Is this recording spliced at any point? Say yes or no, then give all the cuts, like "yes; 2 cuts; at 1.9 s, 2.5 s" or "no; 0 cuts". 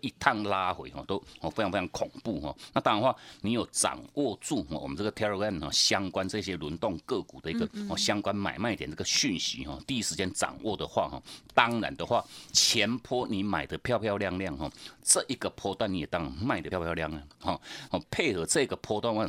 yes; 2 cuts; at 16.7 s, 17.9 s